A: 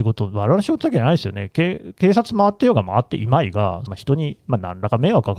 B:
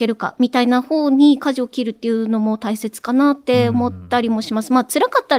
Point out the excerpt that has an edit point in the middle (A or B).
A